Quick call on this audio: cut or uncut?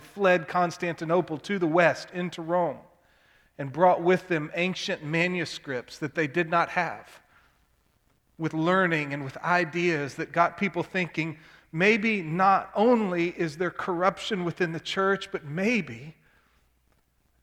uncut